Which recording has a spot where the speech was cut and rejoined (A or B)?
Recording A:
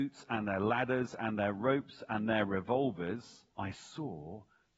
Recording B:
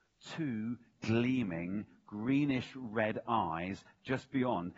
A